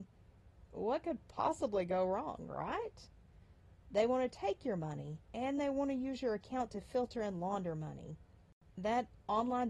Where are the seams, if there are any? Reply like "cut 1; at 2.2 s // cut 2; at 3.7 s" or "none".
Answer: cut 1; at 3.8 s // cut 2; at 5.2 s